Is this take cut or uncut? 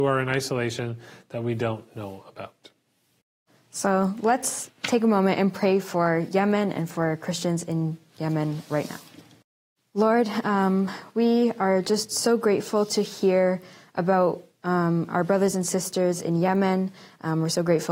uncut